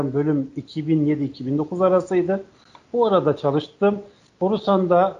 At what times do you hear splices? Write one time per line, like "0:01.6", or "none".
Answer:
0:04.3